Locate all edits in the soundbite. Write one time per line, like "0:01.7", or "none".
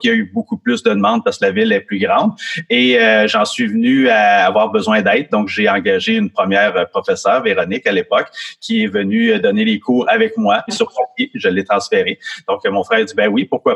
0:10.7